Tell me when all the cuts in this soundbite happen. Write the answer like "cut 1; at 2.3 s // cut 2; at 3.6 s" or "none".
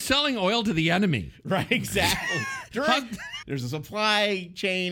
cut 1; at 3.4 s

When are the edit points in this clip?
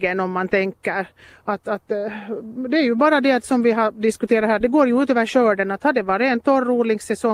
cut 1; at 4.6 s

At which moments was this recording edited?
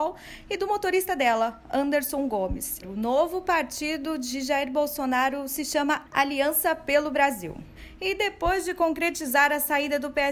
cut 1; at 2.8 s

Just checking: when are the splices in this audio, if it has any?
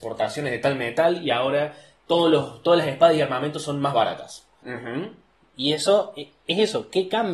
cut 1; at 4.6 s

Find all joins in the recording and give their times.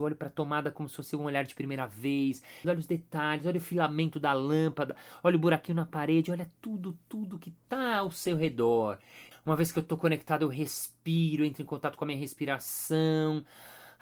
cut 1; at 2.6 s // cut 2; at 9.3 s

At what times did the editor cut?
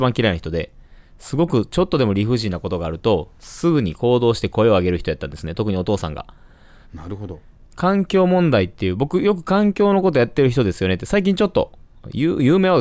cut 1; at 6.9 s

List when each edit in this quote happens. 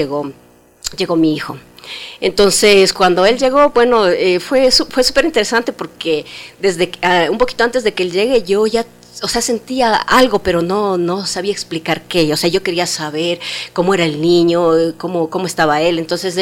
none

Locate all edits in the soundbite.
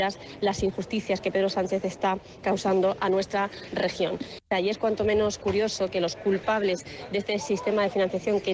cut 1; at 4.5 s

